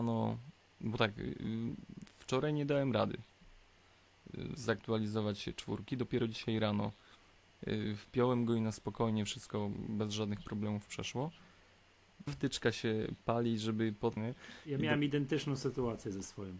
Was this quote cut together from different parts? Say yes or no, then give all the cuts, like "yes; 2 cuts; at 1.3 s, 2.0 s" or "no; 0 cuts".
yes; 2 cuts; at 12.3 s, 14.2 s